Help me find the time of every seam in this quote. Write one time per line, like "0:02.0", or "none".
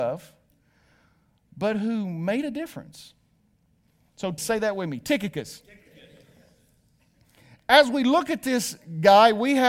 0:04.4